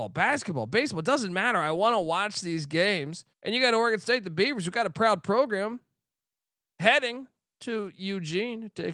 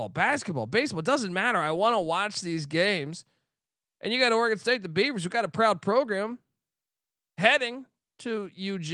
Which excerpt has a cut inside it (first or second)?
first